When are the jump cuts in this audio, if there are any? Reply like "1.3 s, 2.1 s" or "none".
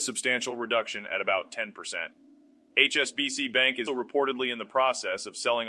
3.9 s